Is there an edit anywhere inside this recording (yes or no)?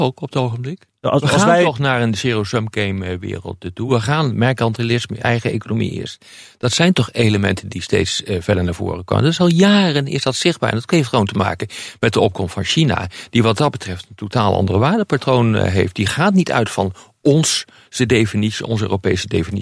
no